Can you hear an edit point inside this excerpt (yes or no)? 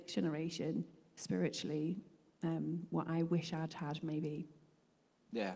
no